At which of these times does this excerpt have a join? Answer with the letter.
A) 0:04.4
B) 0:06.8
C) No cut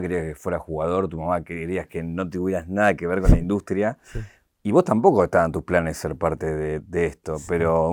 B